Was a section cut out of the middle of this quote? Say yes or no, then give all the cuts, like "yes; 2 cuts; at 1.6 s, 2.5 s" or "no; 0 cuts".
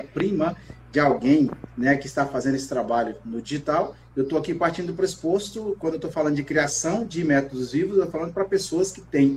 no; 0 cuts